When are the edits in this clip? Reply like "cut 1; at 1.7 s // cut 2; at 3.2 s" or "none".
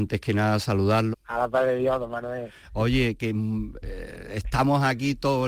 cut 1; at 1.1 s